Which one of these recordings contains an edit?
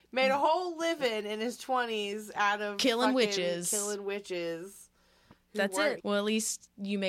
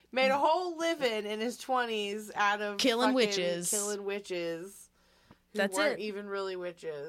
first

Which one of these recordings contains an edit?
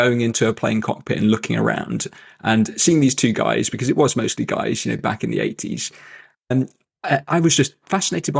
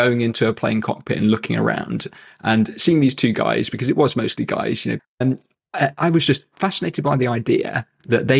second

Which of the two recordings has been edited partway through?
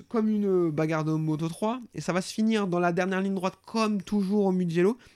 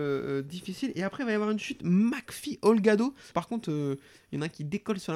second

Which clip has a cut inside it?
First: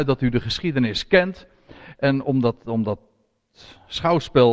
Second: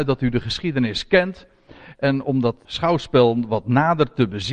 second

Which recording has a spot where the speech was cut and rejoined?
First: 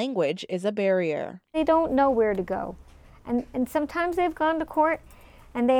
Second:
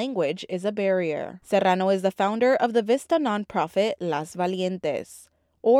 second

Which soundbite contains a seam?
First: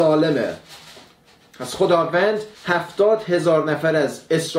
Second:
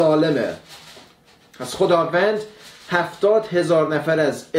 first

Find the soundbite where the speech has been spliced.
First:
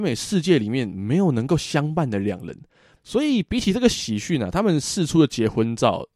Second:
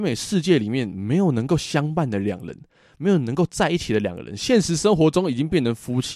first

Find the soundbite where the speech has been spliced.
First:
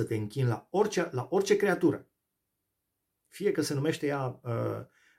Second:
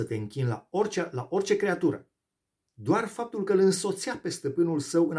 second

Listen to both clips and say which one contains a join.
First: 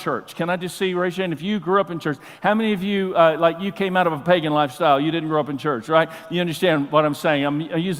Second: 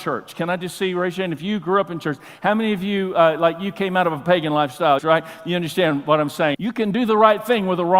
second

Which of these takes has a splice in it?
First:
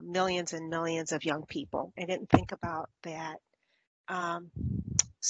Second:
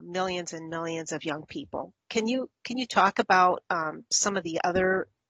first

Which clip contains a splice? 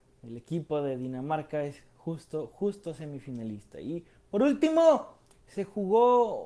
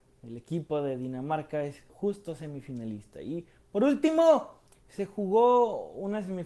second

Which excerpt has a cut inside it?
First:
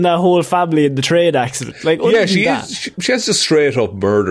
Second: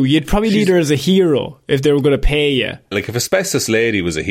second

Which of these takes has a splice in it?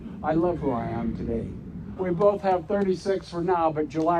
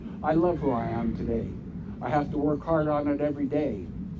first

